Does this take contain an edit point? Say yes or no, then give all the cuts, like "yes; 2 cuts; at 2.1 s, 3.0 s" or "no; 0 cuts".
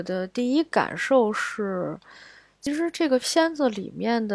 no; 0 cuts